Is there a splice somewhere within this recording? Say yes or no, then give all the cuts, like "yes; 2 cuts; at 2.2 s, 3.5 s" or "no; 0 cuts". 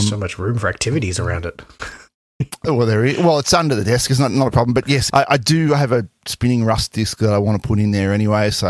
yes; 1 cut; at 5.1 s